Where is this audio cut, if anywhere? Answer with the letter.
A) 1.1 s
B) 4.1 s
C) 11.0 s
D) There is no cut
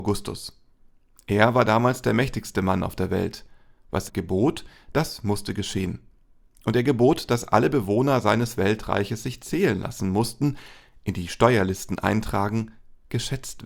B